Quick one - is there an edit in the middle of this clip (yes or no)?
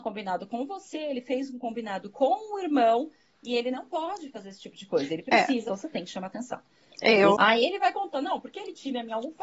yes